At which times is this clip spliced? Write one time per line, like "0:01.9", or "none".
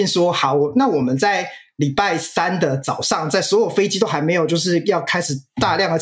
none